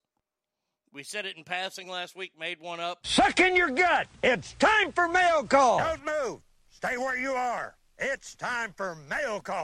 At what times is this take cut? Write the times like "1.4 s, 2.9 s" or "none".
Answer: 3.0 s